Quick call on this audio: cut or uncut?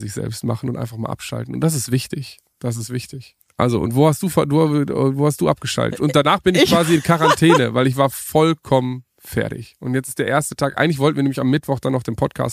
uncut